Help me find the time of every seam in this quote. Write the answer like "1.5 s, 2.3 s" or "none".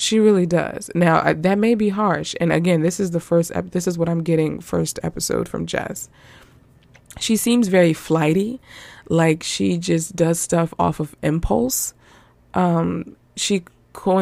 none

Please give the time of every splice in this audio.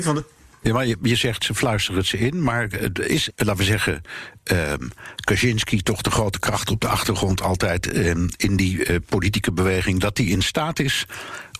3.3 s

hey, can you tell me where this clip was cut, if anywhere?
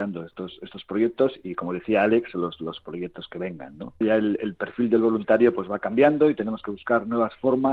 4.0 s

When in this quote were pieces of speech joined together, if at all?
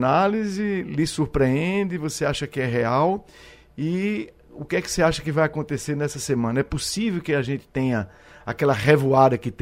none

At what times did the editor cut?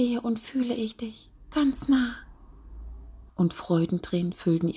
3.3 s

